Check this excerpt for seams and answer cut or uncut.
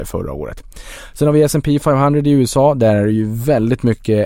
uncut